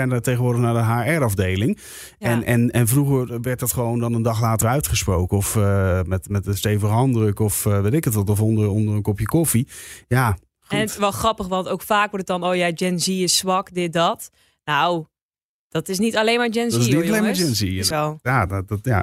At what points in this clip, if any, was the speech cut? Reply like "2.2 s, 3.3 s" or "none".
4.6 s, 10.0 s, 17.9 s